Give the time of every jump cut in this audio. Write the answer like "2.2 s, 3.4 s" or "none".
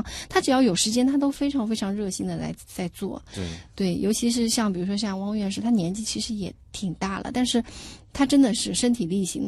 none